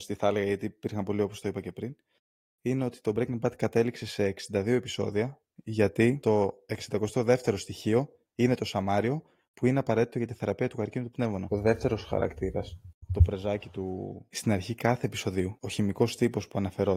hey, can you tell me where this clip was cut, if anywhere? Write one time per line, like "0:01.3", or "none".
0:11.5
0:14.3